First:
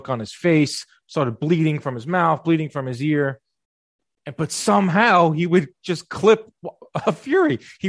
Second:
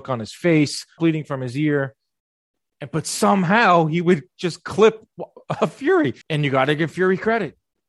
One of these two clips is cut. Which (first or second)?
second